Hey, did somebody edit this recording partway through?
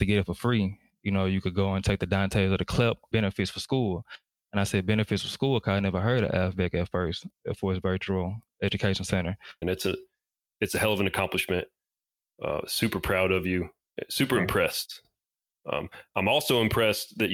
yes; 2 cuts; at 3.1 s, 9.6 s

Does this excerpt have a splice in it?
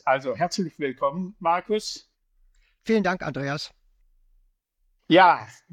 no; 0 cuts

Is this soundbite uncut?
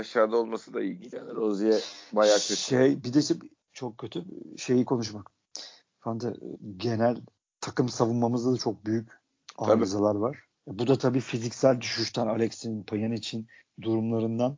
yes; 0 cuts

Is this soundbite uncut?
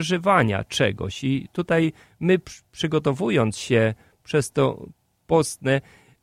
yes; 0 cuts

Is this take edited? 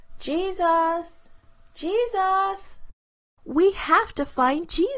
yes; 1 cut; at 3.4 s

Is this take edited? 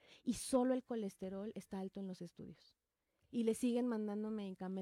no; 0 cuts

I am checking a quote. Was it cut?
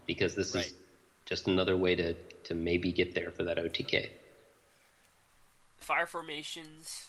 no; 0 cuts

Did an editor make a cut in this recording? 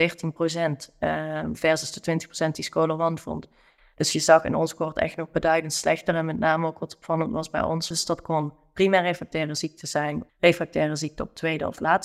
yes; 2 cuts; at 7.9 s, 10.3 s

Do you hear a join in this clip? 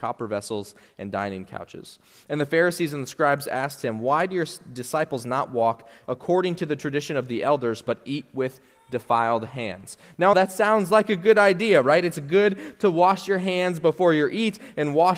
yes; 1 cut; at 10.3 s

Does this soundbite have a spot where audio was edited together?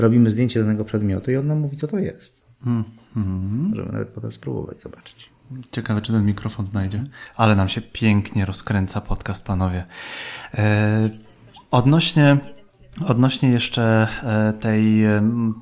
no; 0 cuts

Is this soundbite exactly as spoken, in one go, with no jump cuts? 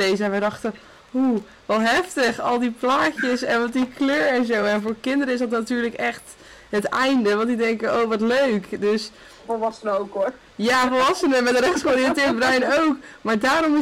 yes; 0 cuts

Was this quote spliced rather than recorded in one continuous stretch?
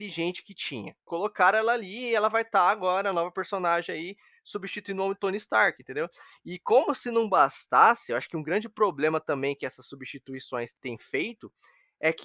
yes; 1 cut; at 1.1 s

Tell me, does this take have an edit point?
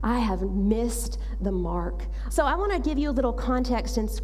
yes; 1 cut; at 2.3 s

